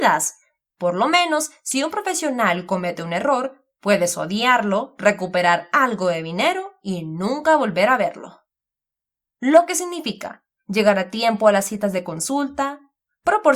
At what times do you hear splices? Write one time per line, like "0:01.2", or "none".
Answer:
0:09.4